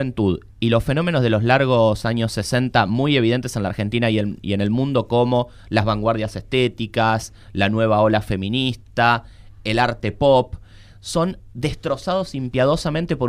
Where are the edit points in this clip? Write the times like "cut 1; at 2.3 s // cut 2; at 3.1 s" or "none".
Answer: none